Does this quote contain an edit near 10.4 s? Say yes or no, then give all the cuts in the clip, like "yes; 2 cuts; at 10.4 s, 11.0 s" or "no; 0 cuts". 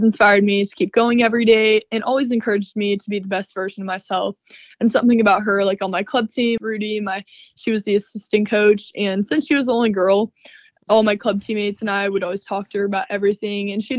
no; 1 cut; at 6.6 s